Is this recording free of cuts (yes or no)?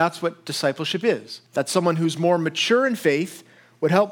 no